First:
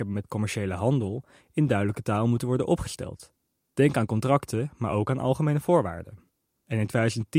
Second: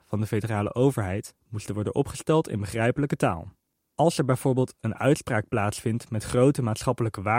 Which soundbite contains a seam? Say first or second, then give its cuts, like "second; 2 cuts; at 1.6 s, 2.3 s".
second; 1 cut; at 3.8 s